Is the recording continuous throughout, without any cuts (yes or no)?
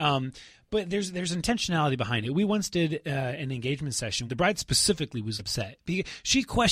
no